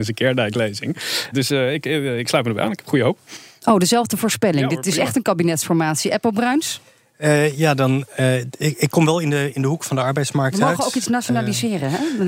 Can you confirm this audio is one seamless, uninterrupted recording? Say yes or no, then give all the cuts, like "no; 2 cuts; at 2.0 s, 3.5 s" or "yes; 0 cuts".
no; 1 cut; at 1.3 s